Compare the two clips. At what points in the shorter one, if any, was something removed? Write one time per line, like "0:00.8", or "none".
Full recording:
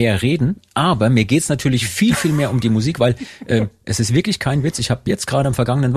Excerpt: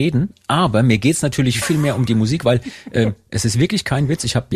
0:01.6